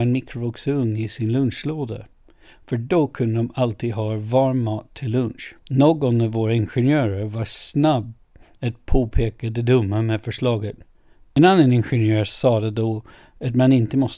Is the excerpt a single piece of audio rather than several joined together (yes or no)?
no